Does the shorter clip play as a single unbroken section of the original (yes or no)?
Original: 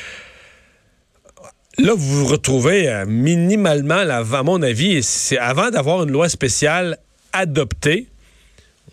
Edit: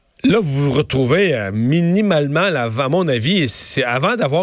yes